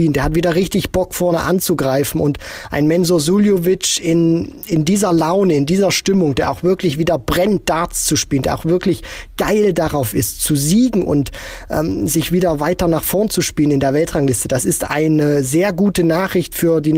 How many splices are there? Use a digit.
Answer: 1